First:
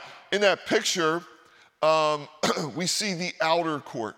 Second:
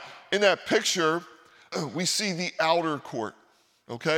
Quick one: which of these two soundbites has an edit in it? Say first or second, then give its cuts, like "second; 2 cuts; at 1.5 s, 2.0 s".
second; 1 cut; at 1.7 s